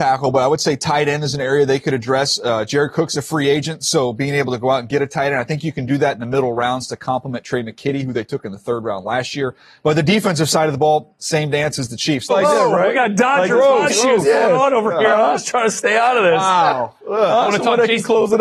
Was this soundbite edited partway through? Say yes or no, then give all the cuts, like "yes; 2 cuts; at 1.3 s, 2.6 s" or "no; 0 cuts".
yes; 2 cuts; at 12.3 s, 13.9 s